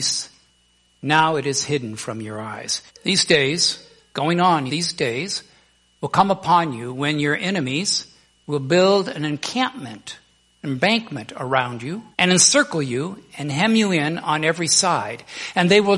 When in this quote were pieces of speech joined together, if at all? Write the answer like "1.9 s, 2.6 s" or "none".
2.9 s, 4.7 s, 12.1 s